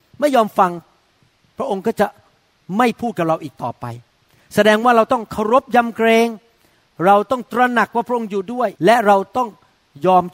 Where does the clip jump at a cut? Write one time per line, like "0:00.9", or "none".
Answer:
0:08.8